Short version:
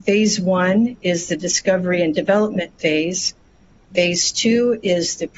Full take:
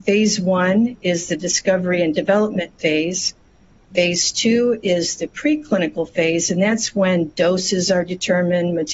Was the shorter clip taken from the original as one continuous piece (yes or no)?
yes